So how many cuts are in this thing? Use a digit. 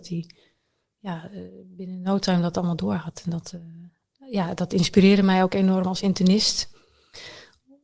0